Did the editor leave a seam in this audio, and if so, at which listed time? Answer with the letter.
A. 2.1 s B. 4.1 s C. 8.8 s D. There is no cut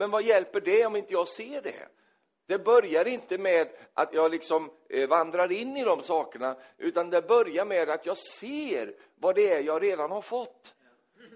B